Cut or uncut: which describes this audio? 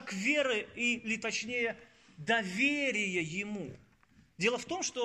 uncut